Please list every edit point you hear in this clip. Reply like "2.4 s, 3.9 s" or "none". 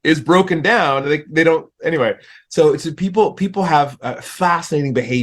none

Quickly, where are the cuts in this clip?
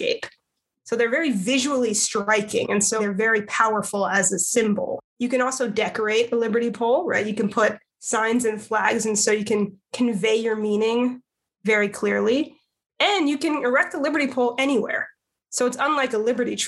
3.0 s

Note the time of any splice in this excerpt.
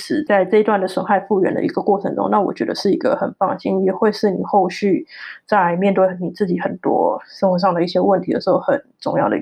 none

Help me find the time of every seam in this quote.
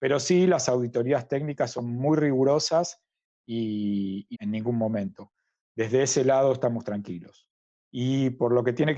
4.3 s, 7.8 s

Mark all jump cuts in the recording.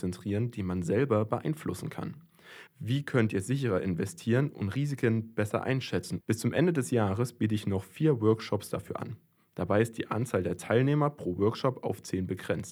2.7 s, 6.2 s

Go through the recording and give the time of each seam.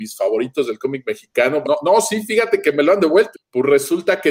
1.6 s, 3.3 s

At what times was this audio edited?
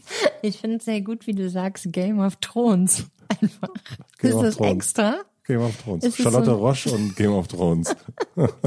none

